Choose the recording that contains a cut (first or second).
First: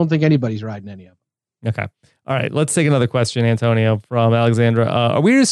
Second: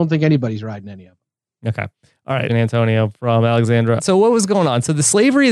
second